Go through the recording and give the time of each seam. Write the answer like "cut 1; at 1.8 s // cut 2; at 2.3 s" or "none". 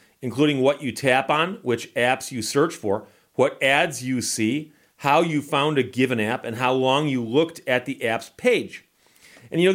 none